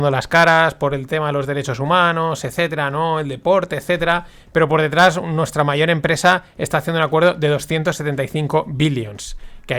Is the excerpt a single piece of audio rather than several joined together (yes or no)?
yes